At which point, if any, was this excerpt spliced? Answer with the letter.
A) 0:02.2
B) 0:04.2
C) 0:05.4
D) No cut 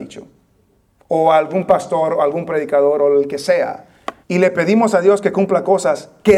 B